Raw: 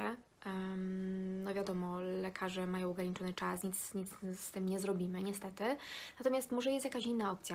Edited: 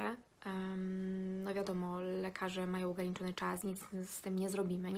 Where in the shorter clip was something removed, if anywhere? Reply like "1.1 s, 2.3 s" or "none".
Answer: 3.6 s